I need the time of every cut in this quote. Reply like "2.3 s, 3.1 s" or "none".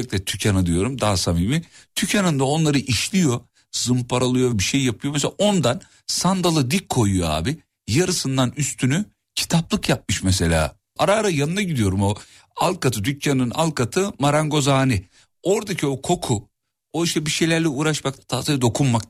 4.5 s, 11.0 s, 18.2 s